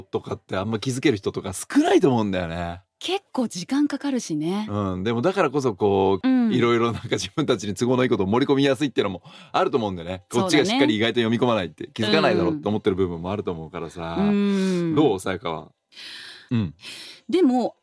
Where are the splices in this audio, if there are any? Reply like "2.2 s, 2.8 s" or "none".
6.2 s, 16.5 s